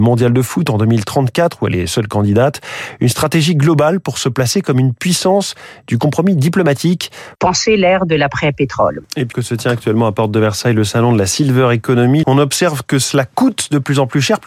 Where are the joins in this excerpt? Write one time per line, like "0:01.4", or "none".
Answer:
0:07.4
0:09.3
0:12.2